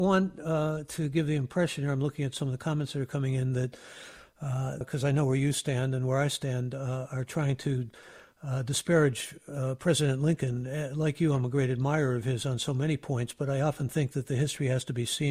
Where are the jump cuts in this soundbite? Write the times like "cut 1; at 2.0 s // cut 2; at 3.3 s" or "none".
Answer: cut 1; at 4.8 s